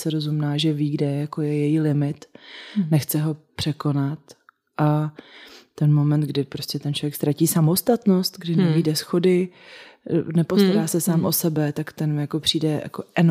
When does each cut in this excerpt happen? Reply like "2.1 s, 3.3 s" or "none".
none